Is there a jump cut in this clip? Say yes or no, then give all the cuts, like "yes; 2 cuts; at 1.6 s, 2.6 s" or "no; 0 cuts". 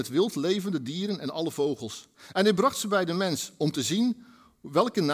no; 0 cuts